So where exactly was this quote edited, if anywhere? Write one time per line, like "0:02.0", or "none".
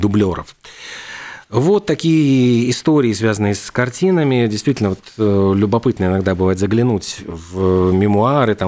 none

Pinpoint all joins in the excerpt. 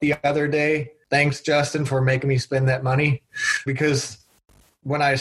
0:03.7

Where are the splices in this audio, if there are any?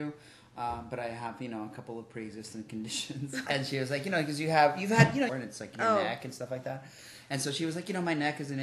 0:03.5
0:05.3

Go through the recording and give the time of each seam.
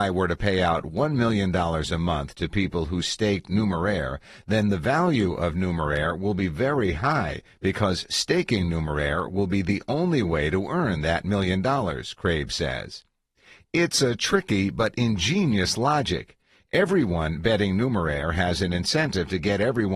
none

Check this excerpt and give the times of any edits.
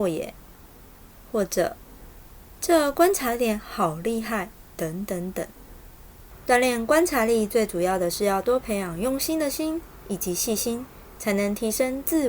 none

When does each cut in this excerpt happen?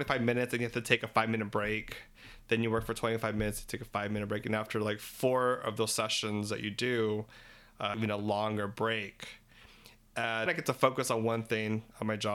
0:07.9
0:10.5

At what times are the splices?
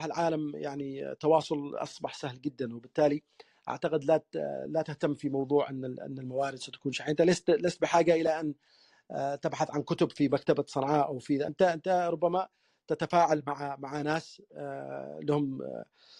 none

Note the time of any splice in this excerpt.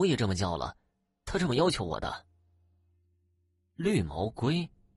none

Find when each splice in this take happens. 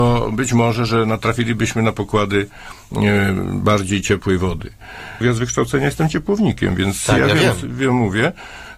0:05.2

